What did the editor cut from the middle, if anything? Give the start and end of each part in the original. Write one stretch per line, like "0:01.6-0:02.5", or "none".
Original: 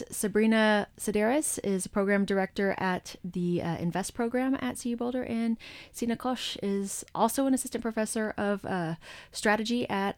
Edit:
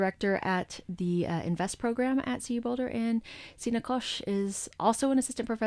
none